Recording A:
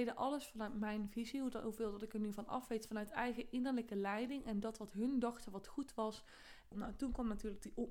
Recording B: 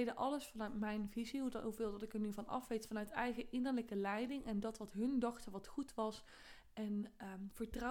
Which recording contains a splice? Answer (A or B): A